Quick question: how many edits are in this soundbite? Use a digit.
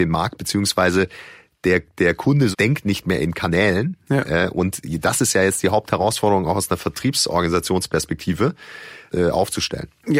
2